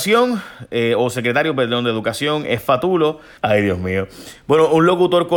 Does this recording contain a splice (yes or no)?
yes